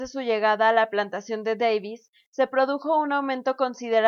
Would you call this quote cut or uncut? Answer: uncut